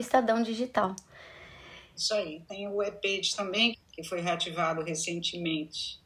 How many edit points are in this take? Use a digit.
1